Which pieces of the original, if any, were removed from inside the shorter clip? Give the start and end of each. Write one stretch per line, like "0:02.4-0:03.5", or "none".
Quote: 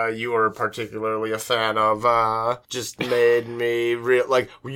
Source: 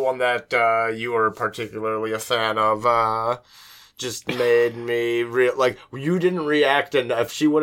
0:03.4-0:03.9